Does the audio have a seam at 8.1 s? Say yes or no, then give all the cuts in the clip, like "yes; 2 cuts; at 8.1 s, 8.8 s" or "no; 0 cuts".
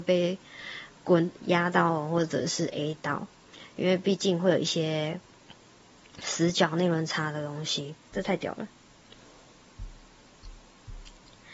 yes; 1 cut; at 8.1 s